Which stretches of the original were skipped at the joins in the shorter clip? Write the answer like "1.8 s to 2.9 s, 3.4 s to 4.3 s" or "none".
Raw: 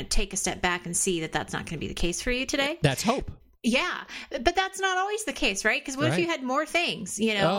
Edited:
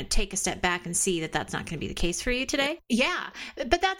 2.8 s to 3.5 s